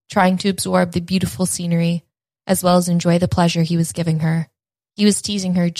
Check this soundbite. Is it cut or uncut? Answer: cut